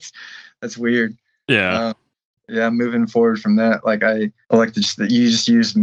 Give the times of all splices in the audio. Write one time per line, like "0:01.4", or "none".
0:02.4
0:04.4